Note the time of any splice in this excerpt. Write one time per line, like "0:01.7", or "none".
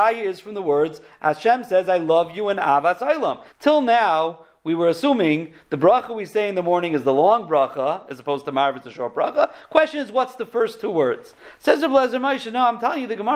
0:03.5

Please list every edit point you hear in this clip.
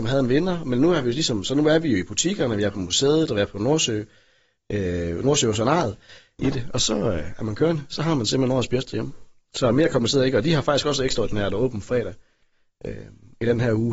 0:06.4

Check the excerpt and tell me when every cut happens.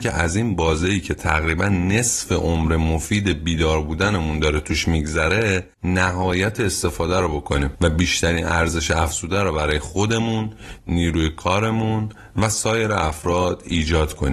0:05.7

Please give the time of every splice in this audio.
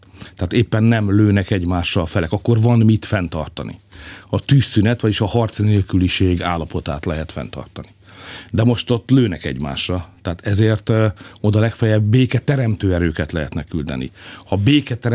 none

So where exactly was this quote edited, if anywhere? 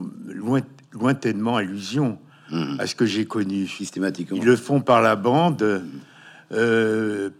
none

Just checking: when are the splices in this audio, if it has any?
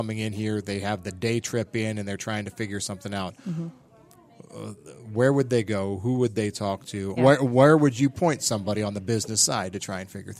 0:07.2

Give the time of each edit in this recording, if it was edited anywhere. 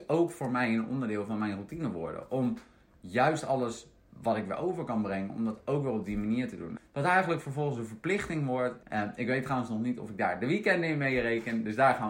0:06.8
0:08.8

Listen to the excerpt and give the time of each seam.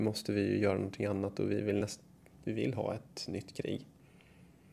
none

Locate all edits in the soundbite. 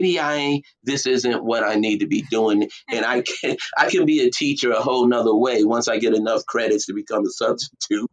none

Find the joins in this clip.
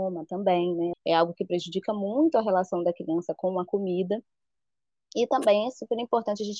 0:00.9

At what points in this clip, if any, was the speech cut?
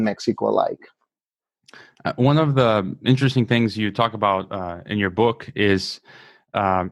none

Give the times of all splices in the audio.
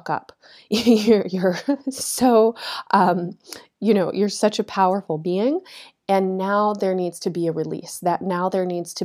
0:06.0

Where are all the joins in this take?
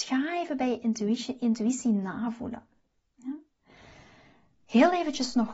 0:03.0

